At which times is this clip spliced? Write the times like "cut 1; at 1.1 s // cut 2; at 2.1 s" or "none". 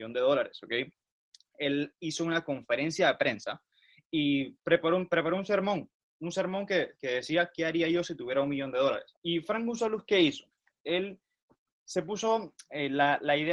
cut 1; at 9.1 s